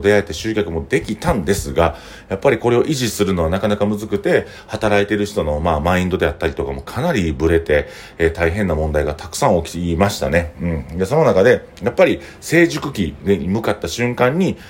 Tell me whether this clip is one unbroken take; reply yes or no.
yes